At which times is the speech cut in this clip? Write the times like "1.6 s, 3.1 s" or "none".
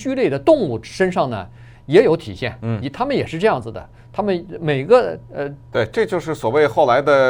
5.7 s